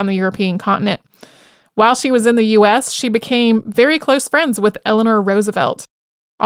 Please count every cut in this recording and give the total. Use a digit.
0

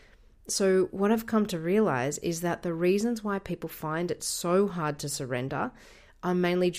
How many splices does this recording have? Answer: 0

